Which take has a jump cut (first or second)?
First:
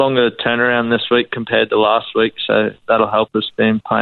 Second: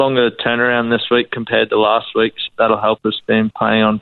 second